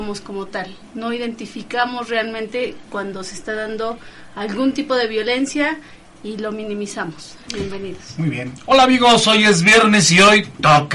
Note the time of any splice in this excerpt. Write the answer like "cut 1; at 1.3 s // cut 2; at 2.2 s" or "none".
cut 1; at 7.5 s

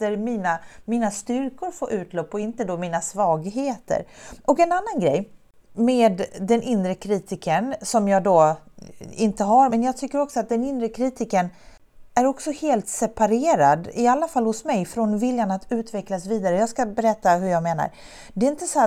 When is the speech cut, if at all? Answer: cut 1; at 9.7 s

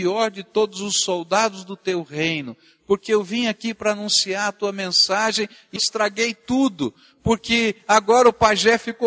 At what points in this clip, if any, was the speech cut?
cut 1; at 5.8 s

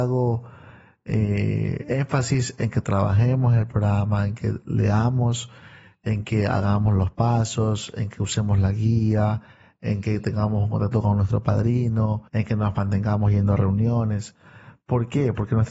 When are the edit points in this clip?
cut 1; at 12.3 s

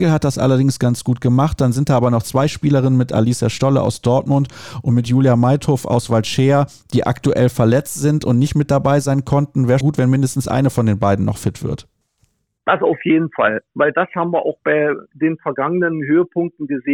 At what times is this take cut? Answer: cut 1; at 9.8 s

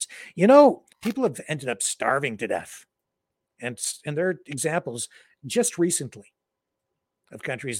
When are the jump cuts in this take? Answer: cut 1; at 0.9 s

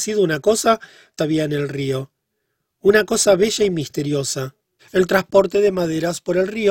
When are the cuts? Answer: cut 1; at 1.2 s // cut 2; at 4.8 s

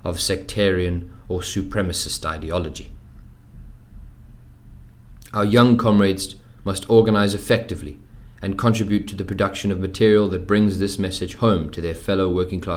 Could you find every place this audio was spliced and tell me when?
none

